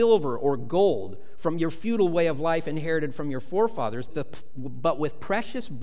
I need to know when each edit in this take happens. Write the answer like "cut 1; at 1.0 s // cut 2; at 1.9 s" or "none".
cut 1; at 4.1 s